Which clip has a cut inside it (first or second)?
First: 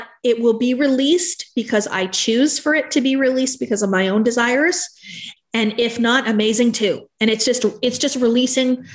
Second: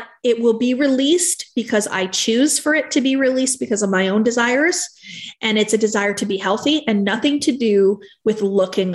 first